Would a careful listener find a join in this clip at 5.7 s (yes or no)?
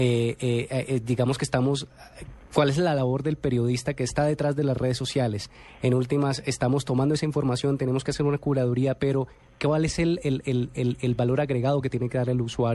no